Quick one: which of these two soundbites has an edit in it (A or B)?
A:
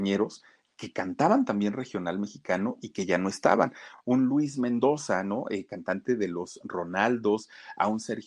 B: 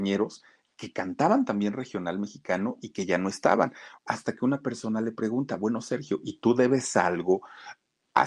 B